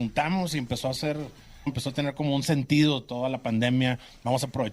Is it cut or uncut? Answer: cut